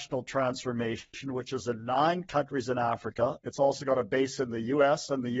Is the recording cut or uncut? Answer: uncut